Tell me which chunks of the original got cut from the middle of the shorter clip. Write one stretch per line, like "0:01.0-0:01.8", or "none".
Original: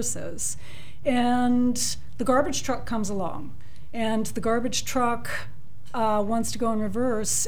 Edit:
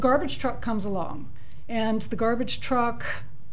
none